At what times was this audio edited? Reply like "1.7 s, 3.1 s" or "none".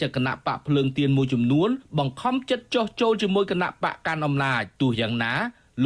4.7 s